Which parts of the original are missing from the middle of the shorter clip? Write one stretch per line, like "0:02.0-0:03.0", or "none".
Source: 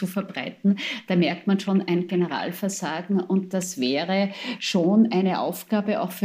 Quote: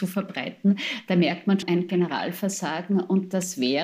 0:01.6-0:01.8